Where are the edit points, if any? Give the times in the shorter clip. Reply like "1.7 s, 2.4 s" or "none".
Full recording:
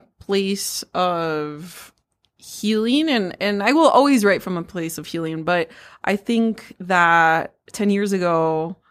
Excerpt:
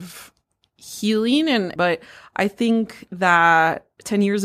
1.8 s